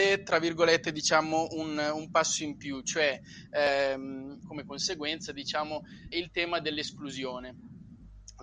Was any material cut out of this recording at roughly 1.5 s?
no; 2 cuts; at 4.4 s, 6.1 s

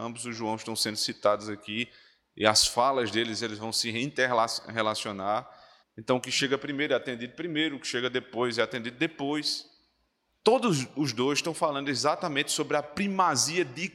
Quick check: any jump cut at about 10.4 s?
yes; 2 cuts; at 5.8 s, 10.4 s

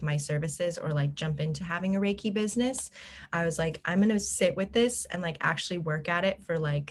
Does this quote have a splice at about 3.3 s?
no; 0 cuts

